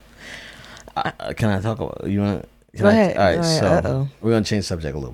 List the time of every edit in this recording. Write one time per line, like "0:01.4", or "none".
none